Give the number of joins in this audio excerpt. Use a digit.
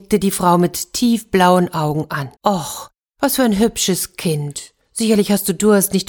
1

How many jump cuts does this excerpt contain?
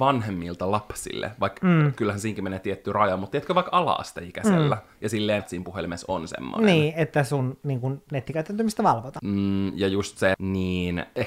3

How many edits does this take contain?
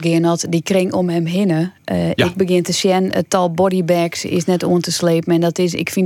0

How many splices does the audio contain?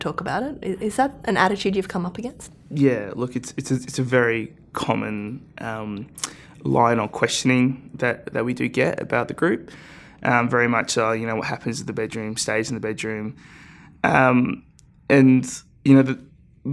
0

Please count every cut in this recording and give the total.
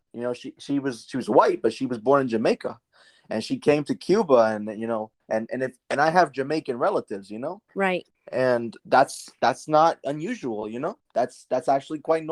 1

